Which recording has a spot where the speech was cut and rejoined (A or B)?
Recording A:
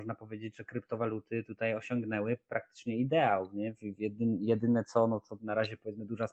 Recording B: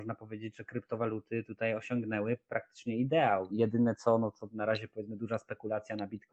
B